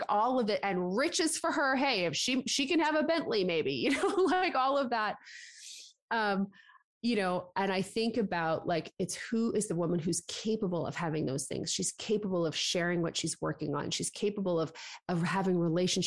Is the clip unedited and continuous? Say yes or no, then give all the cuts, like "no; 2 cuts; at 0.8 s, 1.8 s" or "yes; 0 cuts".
yes; 0 cuts